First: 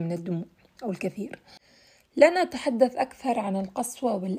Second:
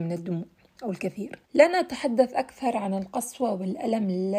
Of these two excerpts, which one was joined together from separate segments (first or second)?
second